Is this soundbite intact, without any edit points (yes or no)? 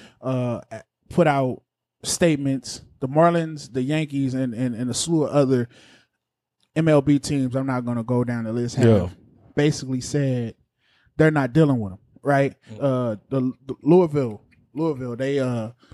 no